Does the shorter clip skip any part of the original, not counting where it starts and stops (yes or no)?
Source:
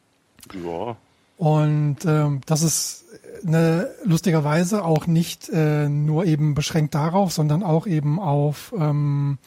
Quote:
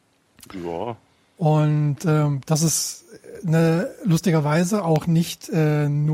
no